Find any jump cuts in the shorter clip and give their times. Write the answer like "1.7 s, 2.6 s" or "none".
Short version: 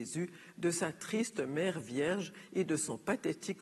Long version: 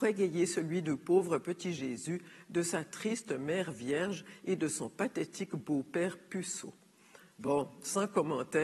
none